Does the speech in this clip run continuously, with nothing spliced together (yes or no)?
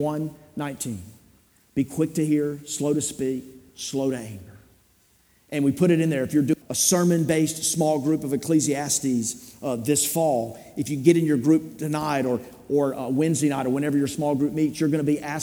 no